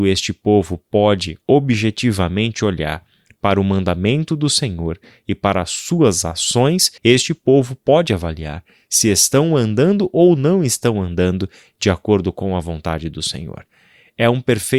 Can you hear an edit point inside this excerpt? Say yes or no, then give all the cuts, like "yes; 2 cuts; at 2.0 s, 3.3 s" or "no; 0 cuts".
yes; 1 cut; at 7.0 s